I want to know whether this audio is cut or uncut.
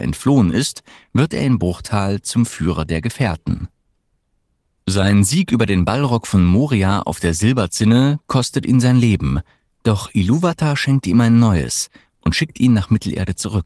uncut